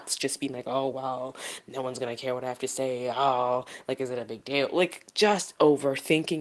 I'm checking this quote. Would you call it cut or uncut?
uncut